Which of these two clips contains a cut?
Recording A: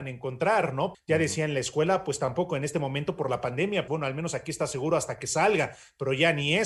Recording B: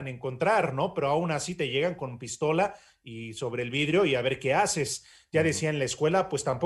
A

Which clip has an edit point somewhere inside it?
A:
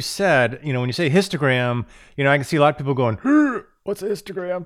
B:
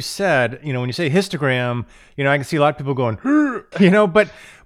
B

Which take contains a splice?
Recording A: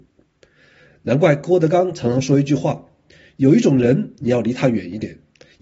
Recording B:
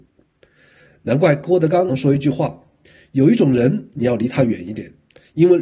B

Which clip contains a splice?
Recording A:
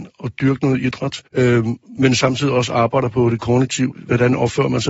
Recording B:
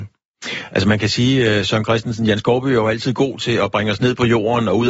A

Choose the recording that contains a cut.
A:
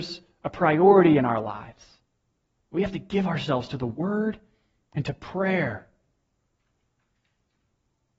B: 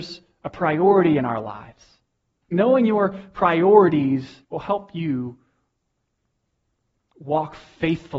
B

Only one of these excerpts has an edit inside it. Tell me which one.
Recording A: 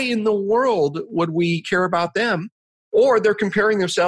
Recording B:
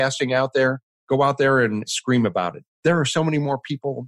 B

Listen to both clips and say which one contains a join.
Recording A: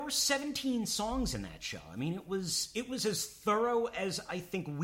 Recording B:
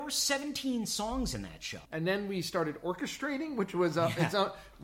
B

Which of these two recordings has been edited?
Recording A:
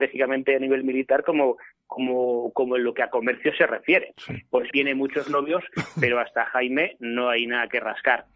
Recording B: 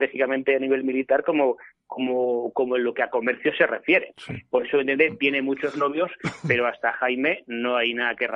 A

